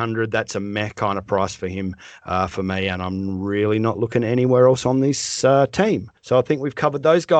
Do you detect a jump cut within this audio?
yes; 1 cut; at 6.2 s

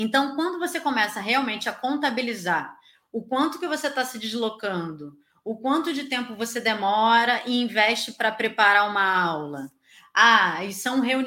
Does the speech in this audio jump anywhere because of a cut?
no; 0 cuts

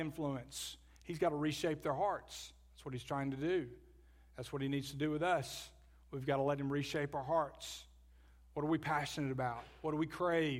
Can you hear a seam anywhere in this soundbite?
no; 0 cuts

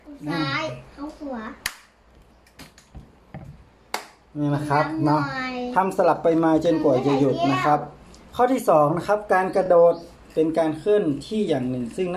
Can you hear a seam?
no; 0 cuts

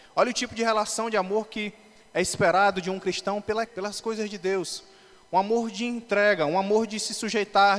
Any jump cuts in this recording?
yes; 1 cut; at 3.7 s

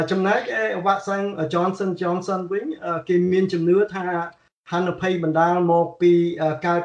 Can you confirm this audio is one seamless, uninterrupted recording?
yes; 0 cuts

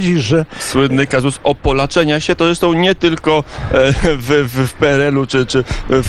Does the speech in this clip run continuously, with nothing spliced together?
yes; 0 cuts

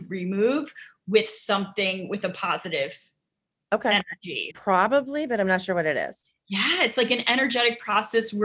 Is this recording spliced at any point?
yes; 1 cut; at 4.5 s

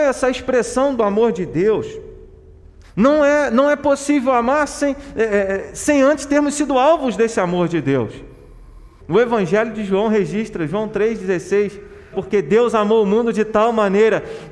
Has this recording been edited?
yes; 3 cuts; at 2.8 s, 9.0 s, 12.1 s

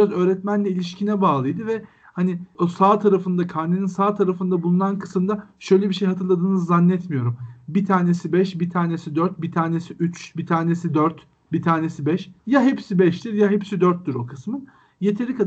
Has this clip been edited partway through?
yes; 1 cut; at 12.4 s

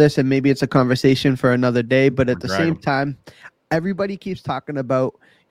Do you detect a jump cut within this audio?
no; 0 cuts

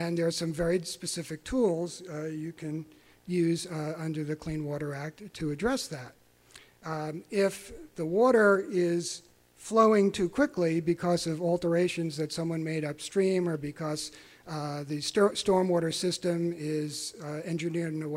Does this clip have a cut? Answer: no; 0 cuts

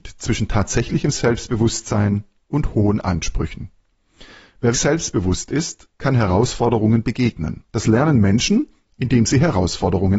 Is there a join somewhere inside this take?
yes; 2 cuts; at 4.7 s, 7.7 s

